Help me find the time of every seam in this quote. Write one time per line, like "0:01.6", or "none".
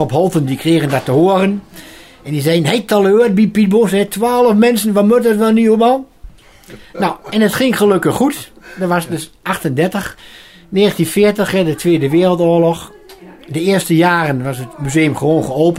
none